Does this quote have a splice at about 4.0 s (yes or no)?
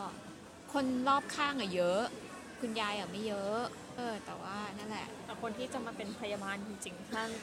yes